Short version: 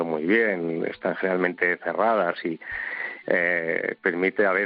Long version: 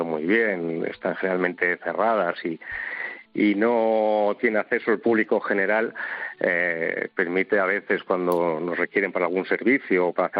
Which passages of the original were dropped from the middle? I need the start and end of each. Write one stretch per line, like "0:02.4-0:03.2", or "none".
0:03.2-0:06.4